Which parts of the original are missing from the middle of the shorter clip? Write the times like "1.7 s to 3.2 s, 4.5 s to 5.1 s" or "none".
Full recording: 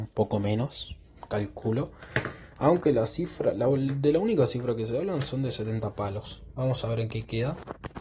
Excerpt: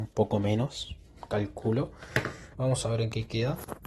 2.5 s to 6.5 s